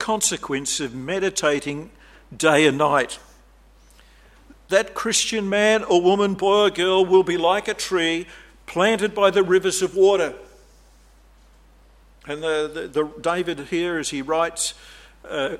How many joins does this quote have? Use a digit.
0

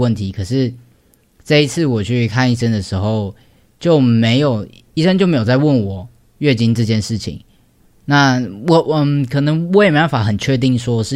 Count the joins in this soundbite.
0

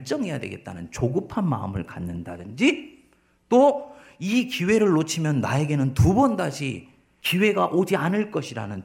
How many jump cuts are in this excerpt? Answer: 0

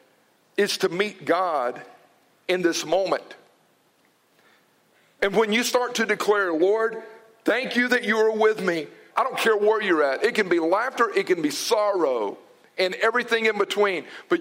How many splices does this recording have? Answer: 1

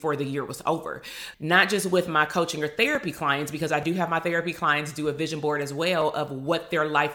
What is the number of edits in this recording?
1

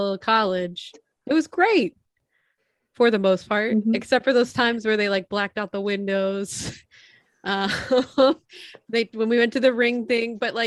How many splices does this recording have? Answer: 0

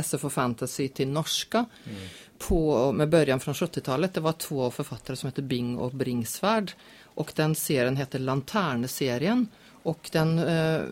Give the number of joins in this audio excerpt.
0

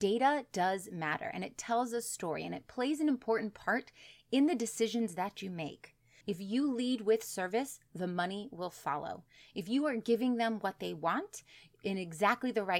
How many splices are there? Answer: 1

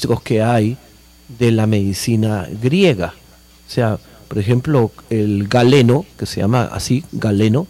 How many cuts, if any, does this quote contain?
0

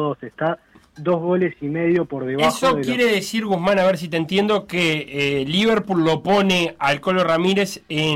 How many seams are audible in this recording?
0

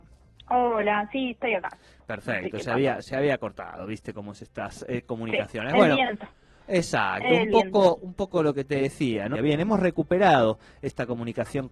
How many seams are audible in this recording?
1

